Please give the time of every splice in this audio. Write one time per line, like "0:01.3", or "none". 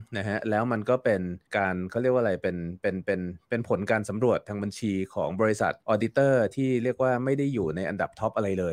0:01.5
0:05.8

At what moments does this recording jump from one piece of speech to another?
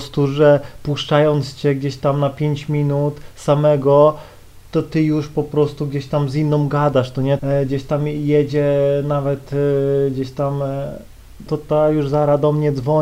0:04.7
0:07.4
0:11.5

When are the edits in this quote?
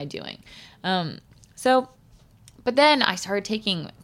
none

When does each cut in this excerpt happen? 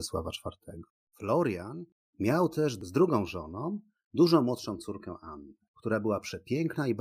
none

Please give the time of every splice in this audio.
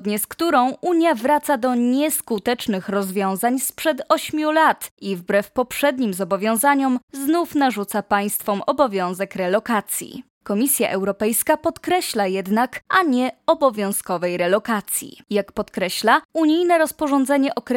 0:12.8
0:15.2

